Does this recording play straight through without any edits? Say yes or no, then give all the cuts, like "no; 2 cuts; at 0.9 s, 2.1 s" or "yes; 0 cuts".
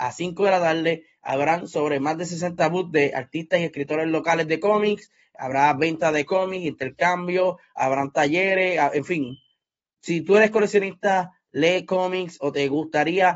yes; 0 cuts